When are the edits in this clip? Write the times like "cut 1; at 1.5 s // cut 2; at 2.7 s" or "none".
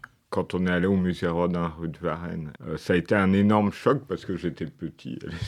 cut 1; at 2.6 s